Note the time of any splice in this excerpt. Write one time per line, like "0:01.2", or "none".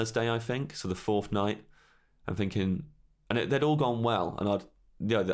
none